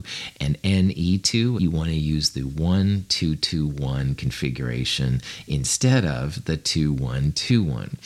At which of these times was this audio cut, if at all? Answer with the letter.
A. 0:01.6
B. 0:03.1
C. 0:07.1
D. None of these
A